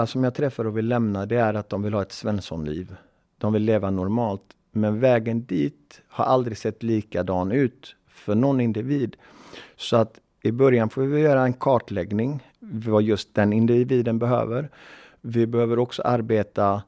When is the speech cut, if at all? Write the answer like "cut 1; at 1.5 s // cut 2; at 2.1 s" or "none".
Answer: cut 1; at 12.5 s